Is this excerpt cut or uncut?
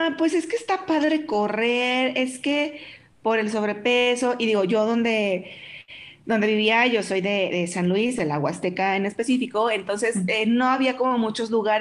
uncut